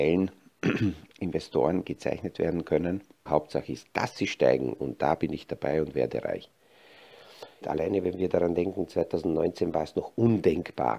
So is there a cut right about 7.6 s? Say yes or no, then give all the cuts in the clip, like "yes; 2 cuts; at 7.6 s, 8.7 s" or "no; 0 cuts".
yes; 2 cuts; at 3.3 s, 7.6 s